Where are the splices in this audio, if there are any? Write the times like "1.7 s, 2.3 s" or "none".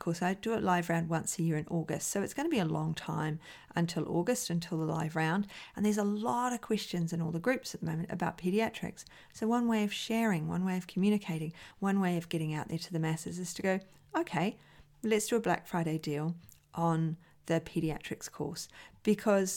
none